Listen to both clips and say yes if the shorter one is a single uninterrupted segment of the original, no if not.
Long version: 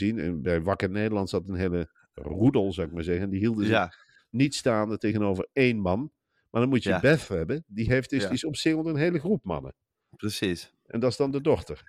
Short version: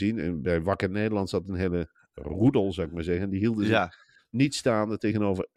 yes